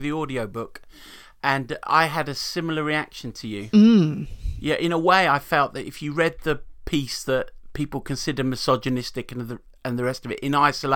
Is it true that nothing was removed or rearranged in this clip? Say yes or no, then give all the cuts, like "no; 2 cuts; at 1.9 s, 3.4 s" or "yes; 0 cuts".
yes; 0 cuts